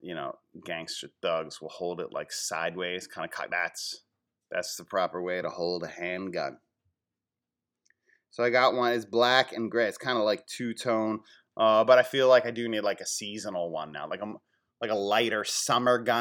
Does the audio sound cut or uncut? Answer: uncut